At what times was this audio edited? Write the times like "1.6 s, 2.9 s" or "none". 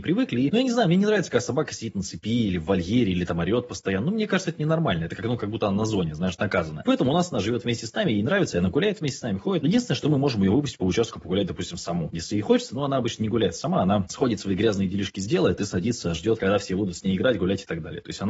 none